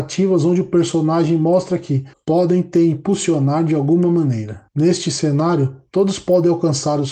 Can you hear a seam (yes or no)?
yes